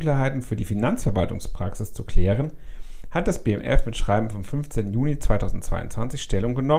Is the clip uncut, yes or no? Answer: yes